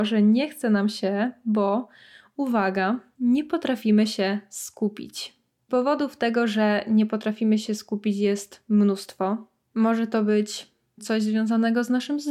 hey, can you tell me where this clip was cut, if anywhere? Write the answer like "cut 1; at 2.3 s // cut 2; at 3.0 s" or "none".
none